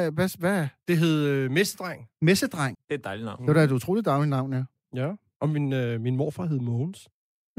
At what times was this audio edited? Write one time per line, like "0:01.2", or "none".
0:02.7